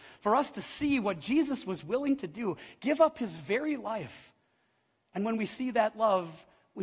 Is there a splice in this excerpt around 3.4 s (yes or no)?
no